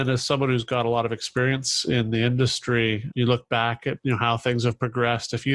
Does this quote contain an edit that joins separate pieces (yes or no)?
yes